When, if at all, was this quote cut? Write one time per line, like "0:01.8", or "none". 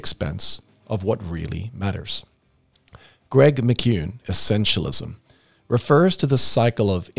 0:04.2